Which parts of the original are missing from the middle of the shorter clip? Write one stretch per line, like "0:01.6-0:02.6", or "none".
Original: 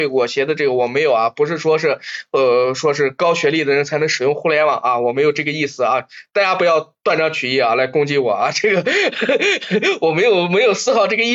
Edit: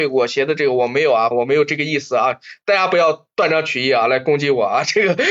0:01.3-0:05.0